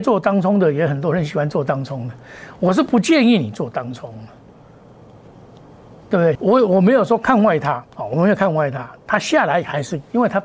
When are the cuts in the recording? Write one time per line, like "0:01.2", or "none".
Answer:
0:06.4
0:07.9